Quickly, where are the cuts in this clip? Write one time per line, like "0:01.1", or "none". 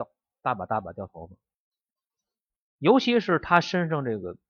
none